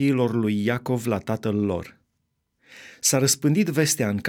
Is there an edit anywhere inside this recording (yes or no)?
no